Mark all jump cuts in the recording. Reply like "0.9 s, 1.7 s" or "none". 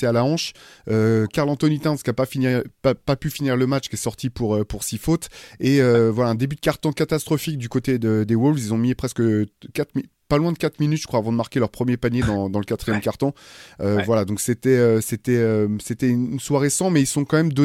none